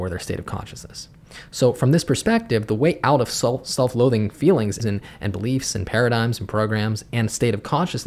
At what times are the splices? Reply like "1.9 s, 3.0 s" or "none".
4.8 s